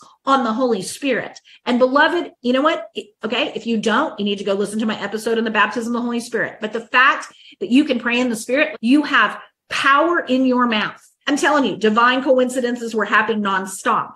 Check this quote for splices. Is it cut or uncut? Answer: cut